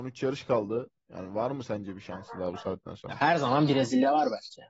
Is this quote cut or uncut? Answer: uncut